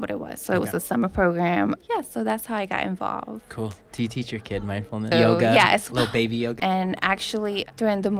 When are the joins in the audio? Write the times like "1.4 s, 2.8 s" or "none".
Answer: 5.1 s, 6.6 s